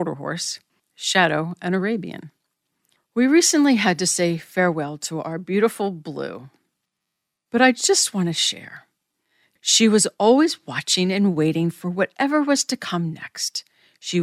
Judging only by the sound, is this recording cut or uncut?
cut